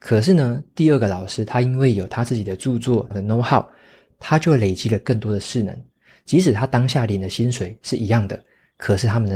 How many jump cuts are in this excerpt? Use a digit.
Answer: 1